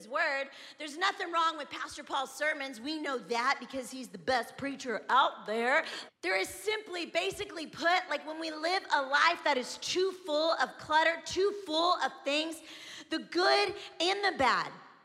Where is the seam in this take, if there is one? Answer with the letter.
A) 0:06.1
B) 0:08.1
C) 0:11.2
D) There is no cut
A